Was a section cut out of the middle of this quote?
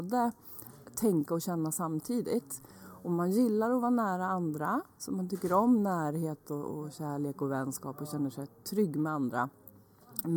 no; 0 cuts

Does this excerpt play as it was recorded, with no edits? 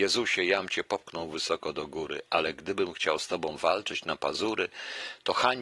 yes; 0 cuts

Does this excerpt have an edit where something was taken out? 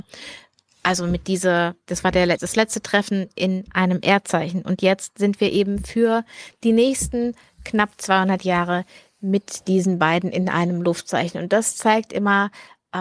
yes; 1 cut; at 2.4 s

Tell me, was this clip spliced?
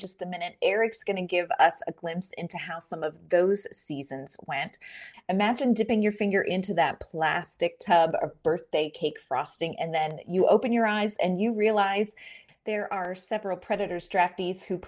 yes; 2 cuts; at 5.1 s, 12.5 s

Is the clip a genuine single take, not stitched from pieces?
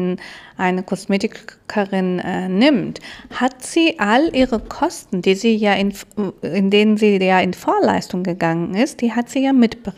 yes; 0 cuts

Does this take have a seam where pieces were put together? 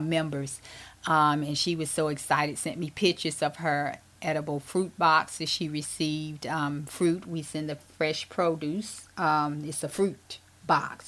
no; 0 cuts

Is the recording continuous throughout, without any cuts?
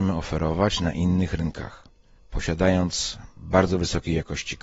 no; 1 cut; at 2.2 s

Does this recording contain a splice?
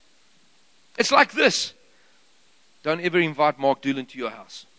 no; 0 cuts

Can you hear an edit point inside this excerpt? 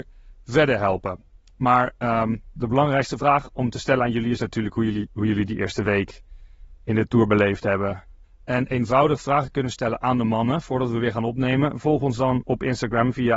yes; 1 cut; at 8.2 s

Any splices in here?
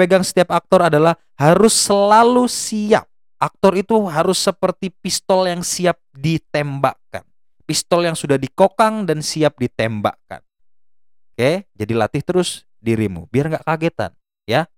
no; 0 cuts

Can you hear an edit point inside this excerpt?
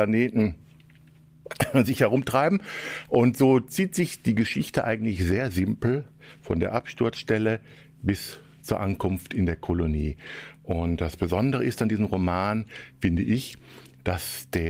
no; 0 cuts

